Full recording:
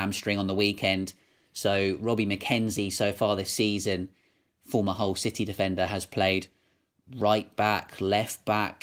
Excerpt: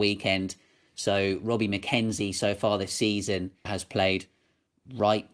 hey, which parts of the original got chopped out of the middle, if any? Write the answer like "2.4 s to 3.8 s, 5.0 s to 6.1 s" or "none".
4.2 s to 5.9 s